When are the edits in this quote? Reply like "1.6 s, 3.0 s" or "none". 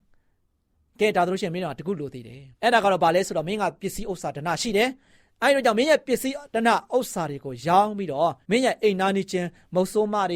2.5 s, 8.4 s

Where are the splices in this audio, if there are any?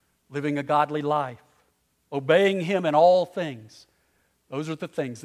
none

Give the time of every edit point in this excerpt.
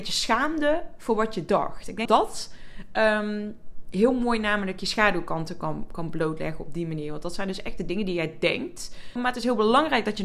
2.1 s, 9.2 s

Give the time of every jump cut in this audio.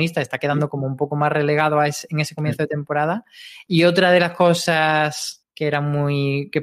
5.4 s

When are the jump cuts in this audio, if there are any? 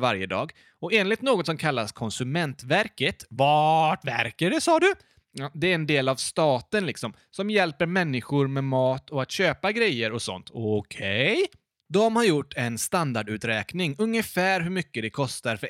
none

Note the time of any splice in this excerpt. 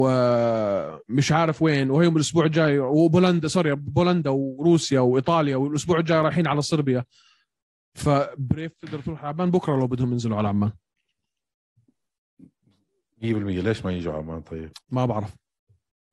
14.8 s

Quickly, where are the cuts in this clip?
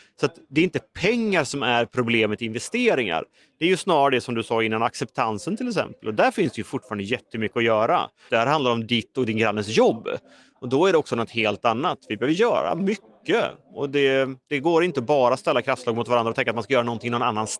8.3 s

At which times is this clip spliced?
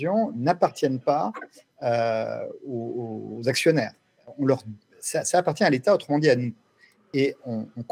none

